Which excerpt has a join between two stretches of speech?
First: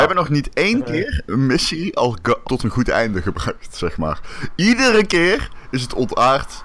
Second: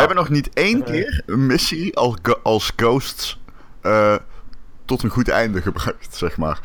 first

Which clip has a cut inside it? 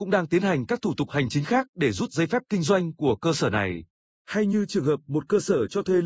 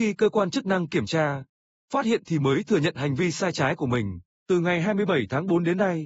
second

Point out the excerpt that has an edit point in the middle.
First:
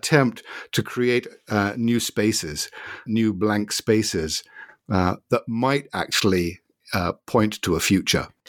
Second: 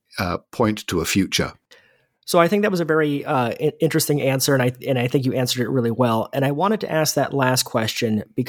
first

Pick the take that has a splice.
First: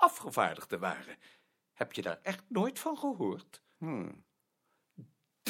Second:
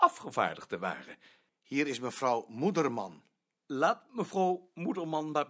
second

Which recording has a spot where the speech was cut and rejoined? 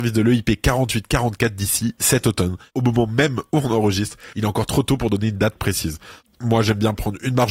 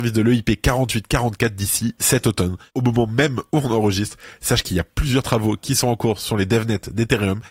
first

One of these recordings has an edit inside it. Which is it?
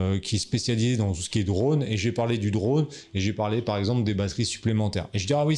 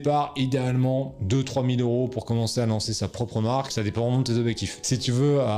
second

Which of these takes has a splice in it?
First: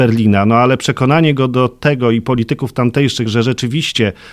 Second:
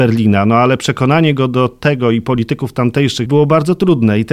second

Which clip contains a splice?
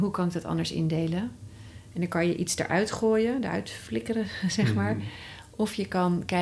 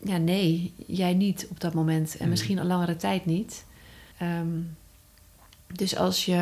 second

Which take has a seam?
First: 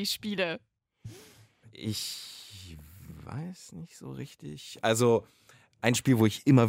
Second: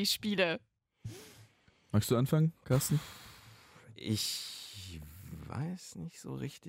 first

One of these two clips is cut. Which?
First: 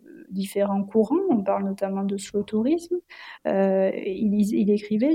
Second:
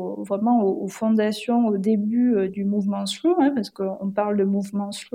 first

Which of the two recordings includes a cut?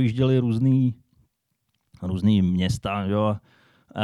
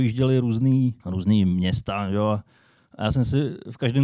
second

